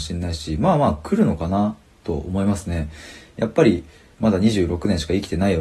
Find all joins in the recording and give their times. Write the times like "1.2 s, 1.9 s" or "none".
none